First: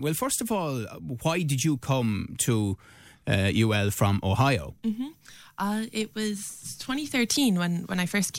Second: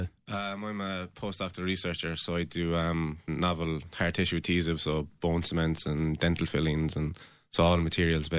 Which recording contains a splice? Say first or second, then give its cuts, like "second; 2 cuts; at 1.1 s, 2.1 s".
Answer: second; 1 cut; at 3.3 s